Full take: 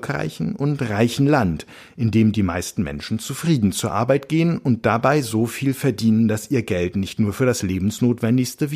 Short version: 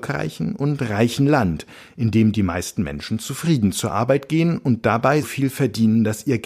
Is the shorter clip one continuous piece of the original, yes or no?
no